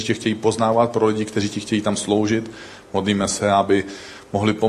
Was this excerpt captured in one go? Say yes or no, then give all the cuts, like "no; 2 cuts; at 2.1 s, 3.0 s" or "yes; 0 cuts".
yes; 0 cuts